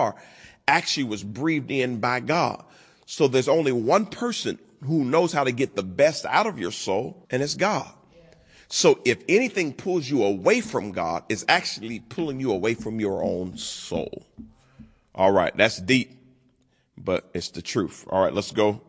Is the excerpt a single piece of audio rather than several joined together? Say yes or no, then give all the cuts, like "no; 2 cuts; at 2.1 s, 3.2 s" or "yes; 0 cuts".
no; 1 cut; at 7.2 s